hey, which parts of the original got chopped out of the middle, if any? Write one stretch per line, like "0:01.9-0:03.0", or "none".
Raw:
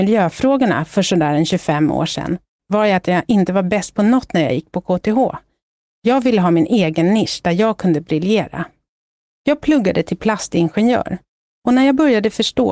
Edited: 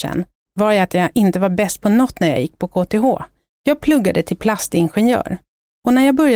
0:05.7-0:09.3